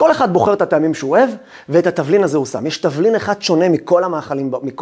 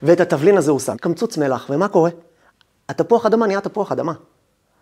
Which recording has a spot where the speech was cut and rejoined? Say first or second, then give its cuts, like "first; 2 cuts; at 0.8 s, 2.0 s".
second; 1 cut; at 0.9 s